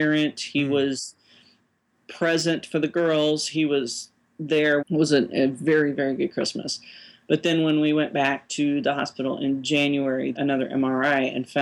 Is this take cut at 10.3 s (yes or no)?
yes